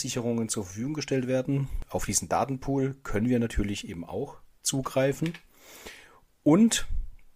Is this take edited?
no; 0 cuts

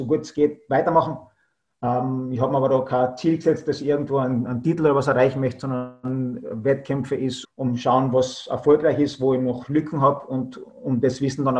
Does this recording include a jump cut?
yes; 1 cut; at 7.4 s

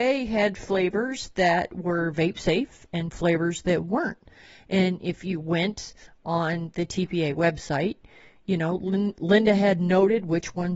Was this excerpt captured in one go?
yes; 0 cuts

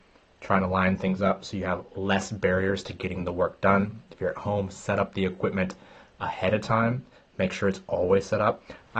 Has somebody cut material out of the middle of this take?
no; 0 cuts

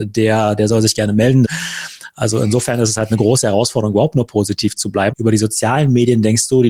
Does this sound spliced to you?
yes; 2 cuts; at 1.4 s, 5.1 s

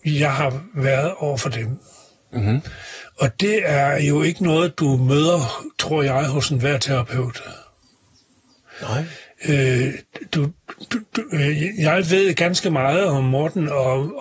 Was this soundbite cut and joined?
no; 0 cuts

